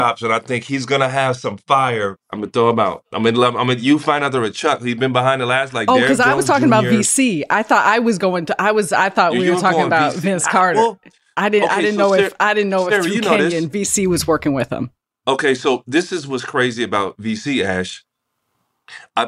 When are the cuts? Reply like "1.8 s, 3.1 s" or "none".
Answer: none